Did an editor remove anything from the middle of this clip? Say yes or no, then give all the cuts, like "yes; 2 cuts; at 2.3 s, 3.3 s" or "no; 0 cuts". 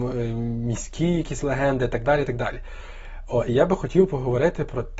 no; 0 cuts